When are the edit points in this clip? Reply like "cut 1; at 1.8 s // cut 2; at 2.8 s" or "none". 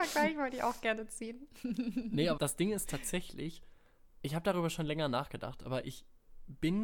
cut 1; at 2.4 s // cut 2; at 4.2 s